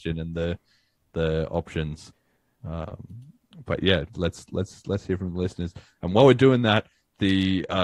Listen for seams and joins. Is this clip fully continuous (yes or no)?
yes